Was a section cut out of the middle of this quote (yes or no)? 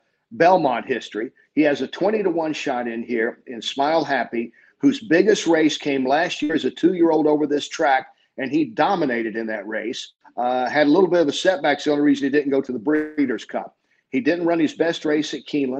no